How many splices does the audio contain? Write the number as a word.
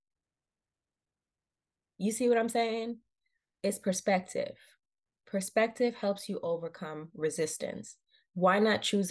zero